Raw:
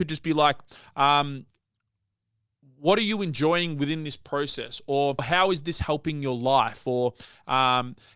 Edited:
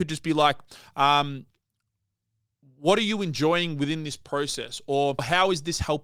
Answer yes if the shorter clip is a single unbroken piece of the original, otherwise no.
yes